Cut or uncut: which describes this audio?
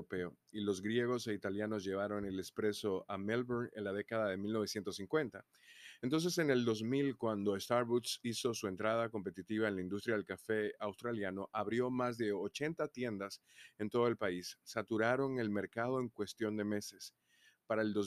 uncut